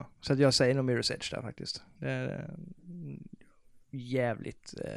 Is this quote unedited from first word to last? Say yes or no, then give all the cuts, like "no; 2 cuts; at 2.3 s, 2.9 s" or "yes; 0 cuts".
yes; 0 cuts